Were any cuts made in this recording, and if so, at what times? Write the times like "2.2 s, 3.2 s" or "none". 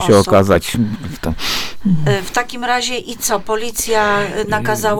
none